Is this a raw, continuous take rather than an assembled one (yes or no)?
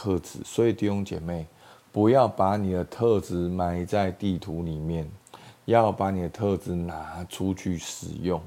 yes